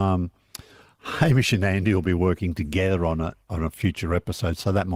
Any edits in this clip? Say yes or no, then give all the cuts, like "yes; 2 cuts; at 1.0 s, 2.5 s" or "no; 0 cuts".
no; 0 cuts